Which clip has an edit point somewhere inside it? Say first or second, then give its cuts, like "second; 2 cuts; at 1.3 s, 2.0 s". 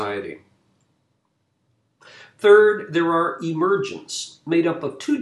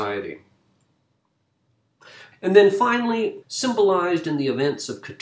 second; 2 cuts; at 2.3 s, 3.4 s